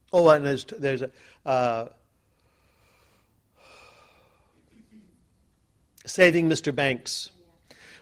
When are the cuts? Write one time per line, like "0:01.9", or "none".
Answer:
none